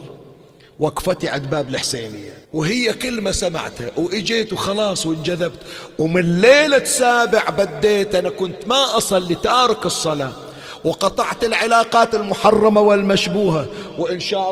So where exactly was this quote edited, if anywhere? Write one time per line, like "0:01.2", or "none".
0:02.4